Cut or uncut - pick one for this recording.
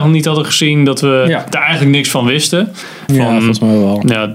cut